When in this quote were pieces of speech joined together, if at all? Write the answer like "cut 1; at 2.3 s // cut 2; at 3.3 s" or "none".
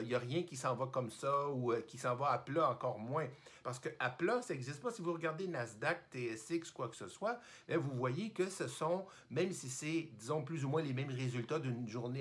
none